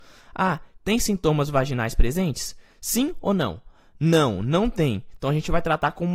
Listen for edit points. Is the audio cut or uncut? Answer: uncut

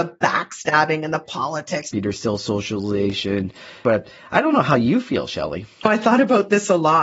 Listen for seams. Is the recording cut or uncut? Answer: cut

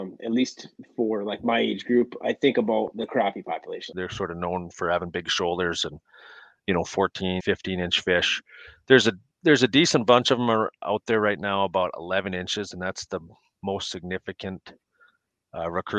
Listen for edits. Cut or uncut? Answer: cut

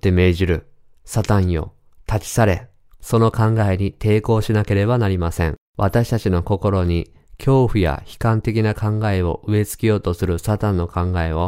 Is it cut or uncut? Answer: cut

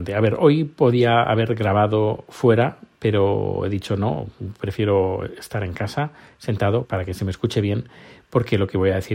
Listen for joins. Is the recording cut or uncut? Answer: cut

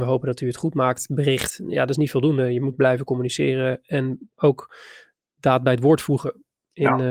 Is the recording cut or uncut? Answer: uncut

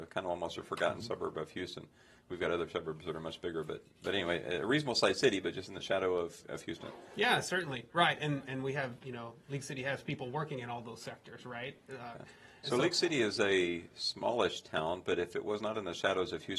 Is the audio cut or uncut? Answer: cut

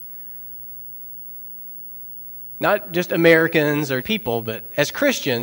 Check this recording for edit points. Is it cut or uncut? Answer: cut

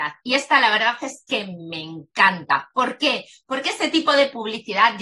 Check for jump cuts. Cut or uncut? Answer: uncut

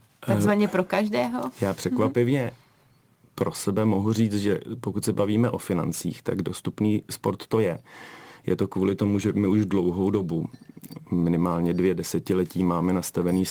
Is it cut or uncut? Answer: uncut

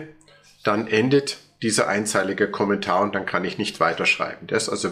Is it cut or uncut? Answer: uncut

